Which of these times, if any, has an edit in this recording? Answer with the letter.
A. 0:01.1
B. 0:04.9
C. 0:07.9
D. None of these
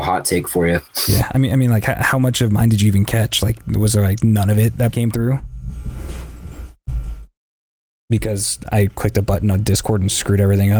B